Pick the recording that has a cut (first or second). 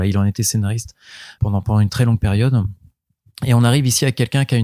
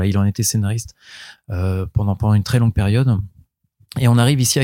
first